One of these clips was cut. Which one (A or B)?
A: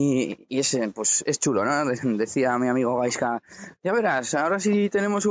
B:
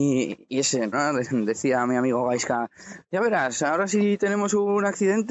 B